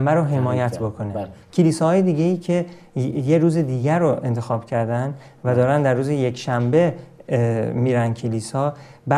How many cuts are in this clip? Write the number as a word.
one